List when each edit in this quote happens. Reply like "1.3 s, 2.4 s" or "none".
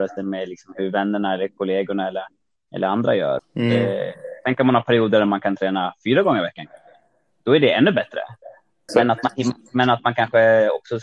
3.4 s, 8.9 s

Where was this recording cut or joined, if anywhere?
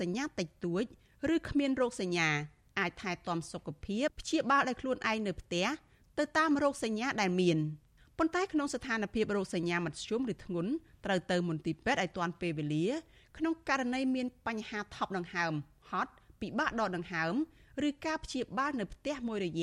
4.1 s

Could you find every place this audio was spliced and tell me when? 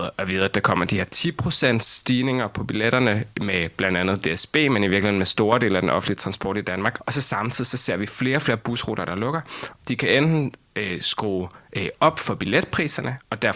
7.0 s, 9.8 s

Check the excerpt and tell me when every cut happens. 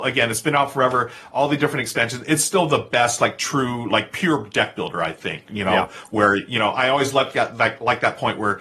none

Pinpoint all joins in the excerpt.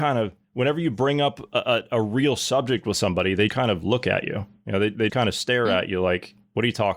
3.5 s, 5.1 s

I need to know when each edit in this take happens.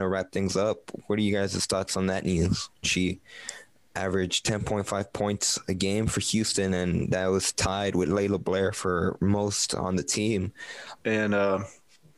2.8 s, 11.0 s

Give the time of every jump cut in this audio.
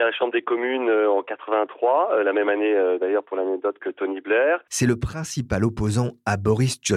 4.7 s

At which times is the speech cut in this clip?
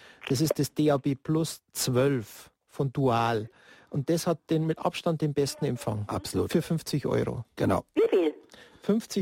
none

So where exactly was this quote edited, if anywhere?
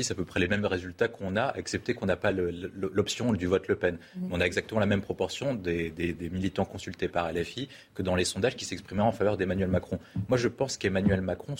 none

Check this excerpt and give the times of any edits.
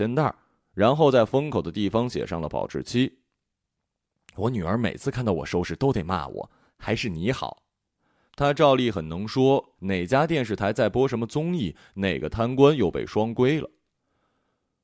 8.3 s, 9.8 s

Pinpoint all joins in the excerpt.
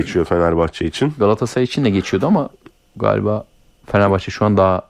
none

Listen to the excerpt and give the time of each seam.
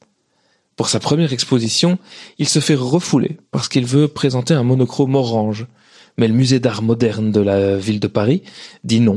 none

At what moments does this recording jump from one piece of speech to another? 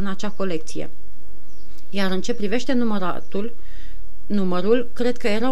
none

